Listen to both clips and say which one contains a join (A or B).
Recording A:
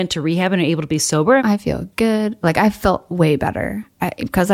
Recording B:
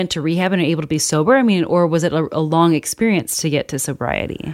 A